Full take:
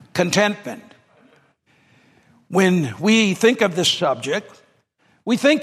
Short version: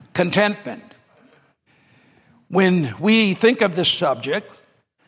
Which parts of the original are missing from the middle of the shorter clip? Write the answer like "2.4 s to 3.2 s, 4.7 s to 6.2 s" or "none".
none